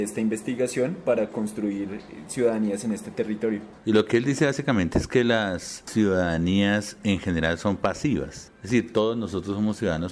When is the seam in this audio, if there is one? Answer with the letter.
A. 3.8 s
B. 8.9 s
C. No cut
A